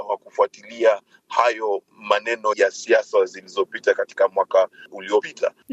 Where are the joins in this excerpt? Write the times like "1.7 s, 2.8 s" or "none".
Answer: 2.5 s